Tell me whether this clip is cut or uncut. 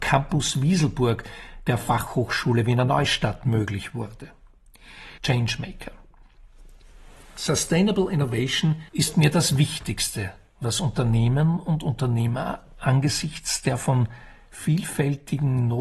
cut